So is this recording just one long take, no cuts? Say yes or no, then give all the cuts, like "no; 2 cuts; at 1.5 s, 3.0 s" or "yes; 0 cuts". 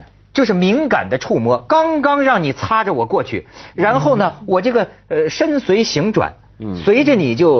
yes; 0 cuts